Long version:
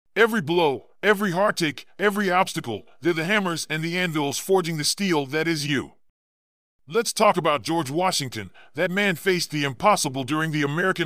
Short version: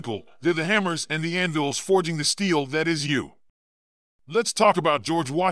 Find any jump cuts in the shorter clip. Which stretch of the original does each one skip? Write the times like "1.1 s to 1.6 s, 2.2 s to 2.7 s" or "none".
none

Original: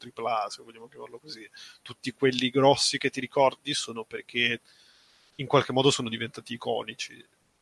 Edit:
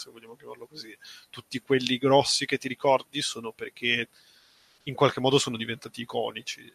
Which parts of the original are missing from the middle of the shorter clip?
none

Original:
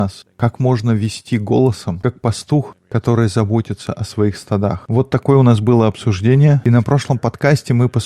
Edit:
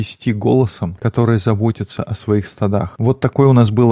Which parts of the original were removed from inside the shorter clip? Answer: 2.0 s to 2.9 s

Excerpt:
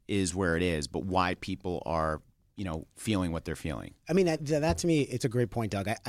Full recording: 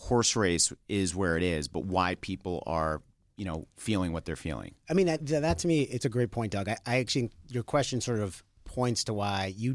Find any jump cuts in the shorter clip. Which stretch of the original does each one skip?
none

